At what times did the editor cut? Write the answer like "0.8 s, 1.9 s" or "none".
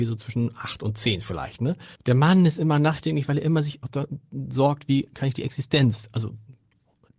2.0 s

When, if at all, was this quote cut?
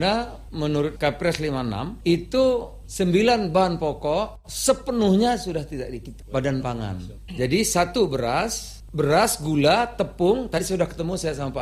none

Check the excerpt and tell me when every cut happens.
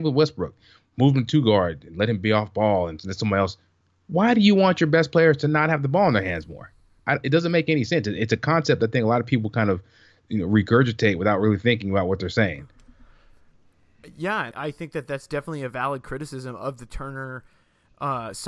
14.5 s

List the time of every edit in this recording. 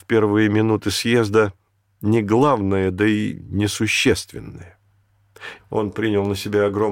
5.6 s

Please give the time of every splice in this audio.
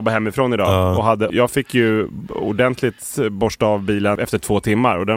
1.3 s

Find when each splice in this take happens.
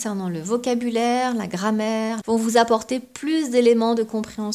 2.2 s

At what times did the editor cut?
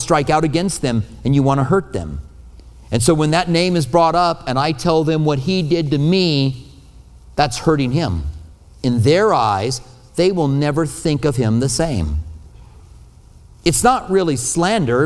none

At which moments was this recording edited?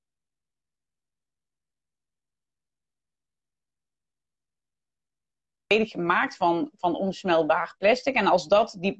none

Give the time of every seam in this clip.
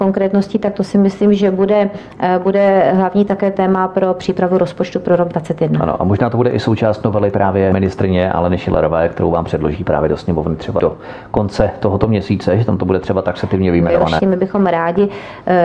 14.2 s

